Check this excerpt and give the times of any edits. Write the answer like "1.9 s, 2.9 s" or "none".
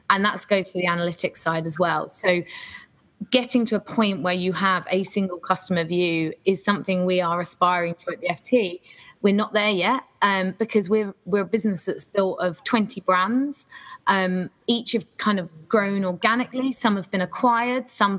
none